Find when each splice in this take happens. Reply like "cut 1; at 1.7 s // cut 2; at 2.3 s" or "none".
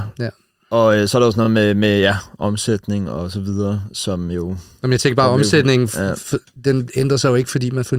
none